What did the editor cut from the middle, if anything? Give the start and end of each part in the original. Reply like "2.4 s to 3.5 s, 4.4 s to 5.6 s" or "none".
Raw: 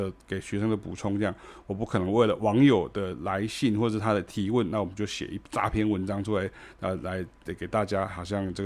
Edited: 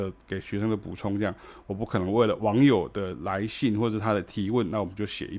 none

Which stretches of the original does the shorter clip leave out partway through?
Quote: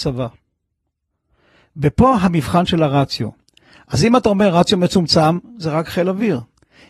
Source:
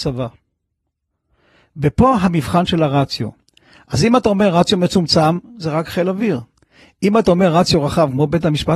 none

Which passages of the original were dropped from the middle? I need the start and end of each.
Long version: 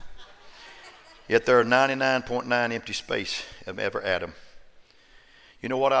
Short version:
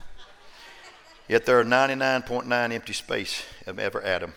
none

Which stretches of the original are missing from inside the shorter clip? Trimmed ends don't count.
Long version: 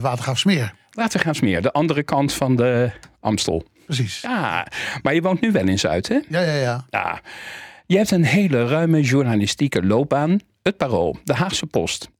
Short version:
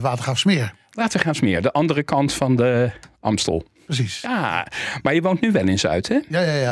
none

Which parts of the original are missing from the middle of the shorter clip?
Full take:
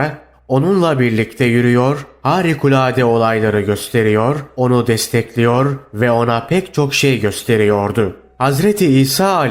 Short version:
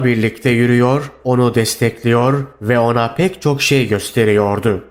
2.1 s to 4.5 s

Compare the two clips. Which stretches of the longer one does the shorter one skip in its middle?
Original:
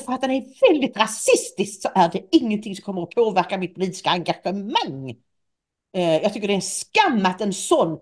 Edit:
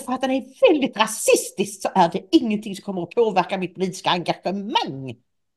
none

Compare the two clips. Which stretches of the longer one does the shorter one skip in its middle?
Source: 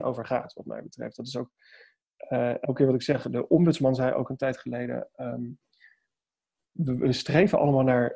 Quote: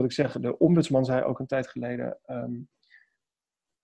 none

